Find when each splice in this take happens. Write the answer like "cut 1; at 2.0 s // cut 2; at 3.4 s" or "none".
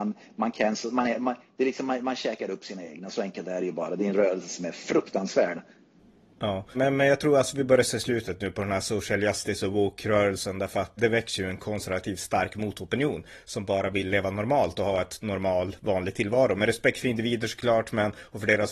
cut 1; at 6.7 s // cut 2; at 11.0 s